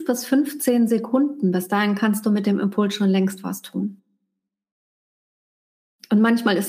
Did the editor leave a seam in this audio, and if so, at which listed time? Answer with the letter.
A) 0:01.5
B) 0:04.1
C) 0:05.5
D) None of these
D